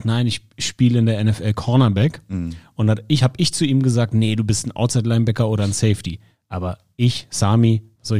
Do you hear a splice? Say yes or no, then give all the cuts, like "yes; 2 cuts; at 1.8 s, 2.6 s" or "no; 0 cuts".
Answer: no; 0 cuts